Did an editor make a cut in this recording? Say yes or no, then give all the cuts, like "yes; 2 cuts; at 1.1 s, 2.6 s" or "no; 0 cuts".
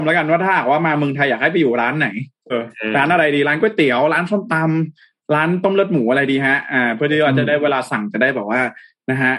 yes; 1 cut; at 2.5 s